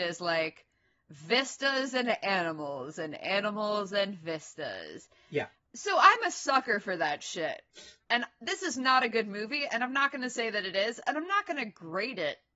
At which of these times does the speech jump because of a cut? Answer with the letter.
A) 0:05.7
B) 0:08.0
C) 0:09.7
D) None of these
B